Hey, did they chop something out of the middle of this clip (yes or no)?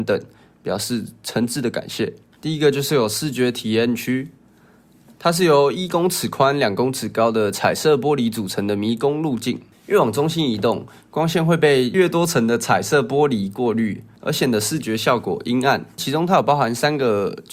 yes